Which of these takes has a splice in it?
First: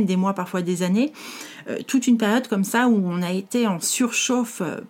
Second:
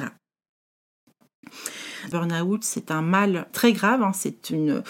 second; 2 cuts; at 2.1 s, 3.5 s

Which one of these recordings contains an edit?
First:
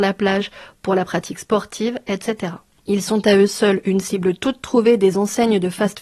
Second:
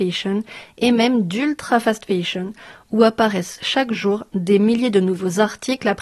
first; 1 cut; at 2.7 s

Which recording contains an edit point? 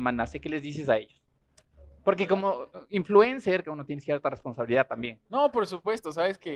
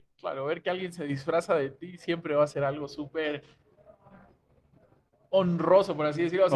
first; 1 cut; at 3.6 s

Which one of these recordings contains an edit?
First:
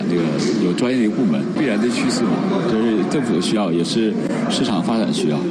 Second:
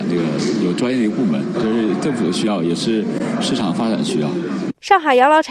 second; 1 cut; at 1.5 s

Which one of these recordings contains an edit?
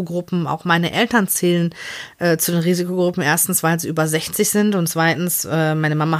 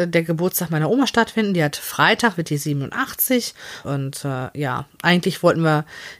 second; 1 cut; at 3.8 s

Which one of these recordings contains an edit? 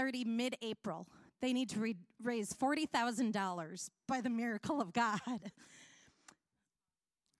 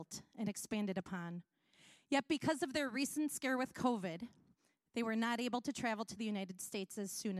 first; 1 cut; at 1.3 s

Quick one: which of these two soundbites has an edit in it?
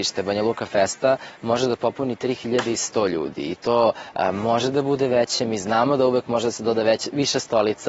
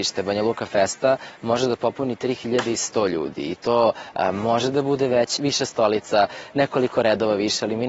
second; 1 cut; at 5.4 s

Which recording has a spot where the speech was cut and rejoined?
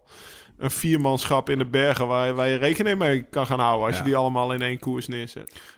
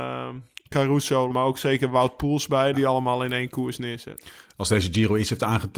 second; 2 cuts; at 1.3 s, 2.7 s

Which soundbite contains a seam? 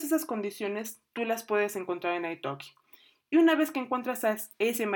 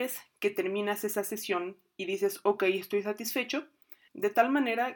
second; 1 cut; at 4.1 s

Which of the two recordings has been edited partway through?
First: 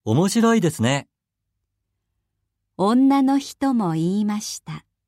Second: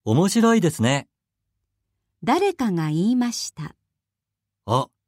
second; 1 cut; at 2.1 s

